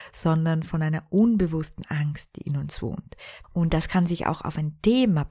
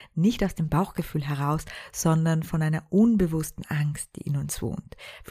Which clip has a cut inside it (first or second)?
first